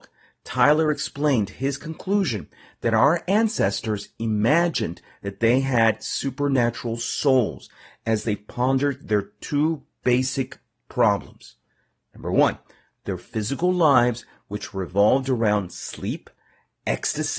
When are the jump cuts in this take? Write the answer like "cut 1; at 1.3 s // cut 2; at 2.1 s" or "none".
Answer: none